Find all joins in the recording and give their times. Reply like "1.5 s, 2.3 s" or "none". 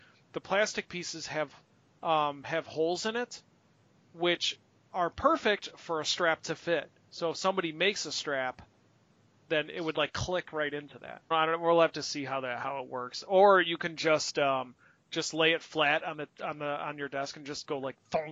11.3 s